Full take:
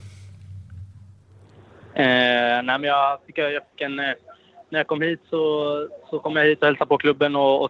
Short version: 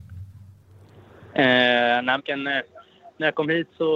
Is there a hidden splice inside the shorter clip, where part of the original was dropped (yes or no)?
yes